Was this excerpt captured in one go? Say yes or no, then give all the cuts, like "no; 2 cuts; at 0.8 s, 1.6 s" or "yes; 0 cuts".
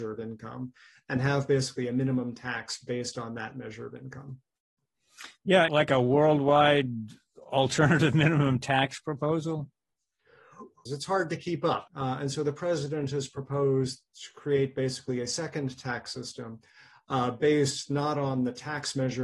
no; 3 cuts; at 5.7 s, 10.9 s, 11.9 s